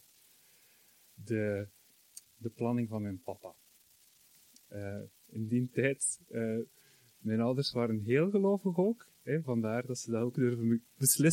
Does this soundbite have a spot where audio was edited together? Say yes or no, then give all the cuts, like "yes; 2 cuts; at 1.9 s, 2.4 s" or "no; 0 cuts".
no; 0 cuts